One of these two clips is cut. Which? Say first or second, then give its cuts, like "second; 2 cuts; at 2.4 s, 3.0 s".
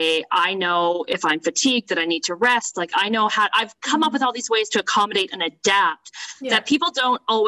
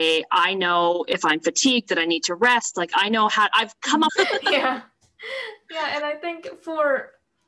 second; 1 cut; at 4.1 s